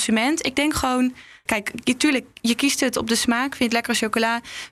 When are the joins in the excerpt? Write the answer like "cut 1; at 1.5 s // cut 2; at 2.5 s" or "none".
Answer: cut 1; at 1.5 s